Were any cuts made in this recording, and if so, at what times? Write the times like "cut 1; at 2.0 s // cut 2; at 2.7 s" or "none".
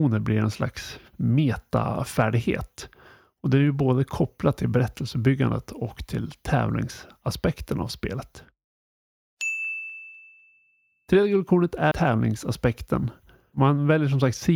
cut 1; at 11.9 s